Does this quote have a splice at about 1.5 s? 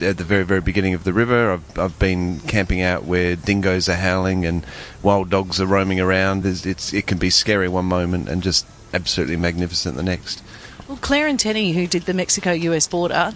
no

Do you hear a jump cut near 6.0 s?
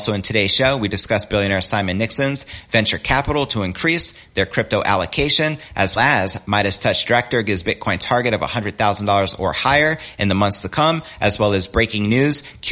yes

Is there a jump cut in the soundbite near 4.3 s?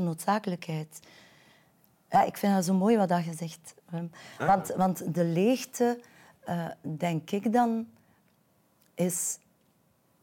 no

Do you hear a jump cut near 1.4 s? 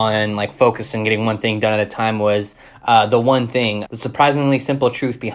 no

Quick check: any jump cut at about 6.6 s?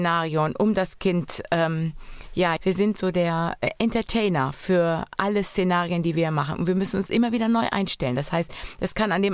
no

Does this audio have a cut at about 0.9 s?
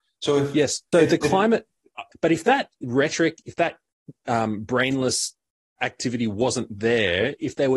yes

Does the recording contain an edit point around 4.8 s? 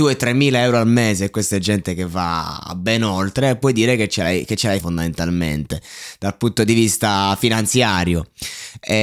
yes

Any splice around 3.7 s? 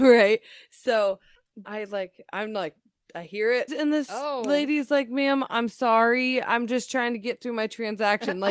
yes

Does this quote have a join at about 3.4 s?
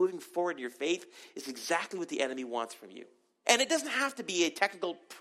yes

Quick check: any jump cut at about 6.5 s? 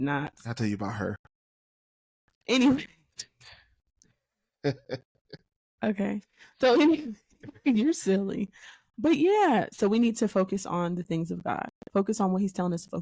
no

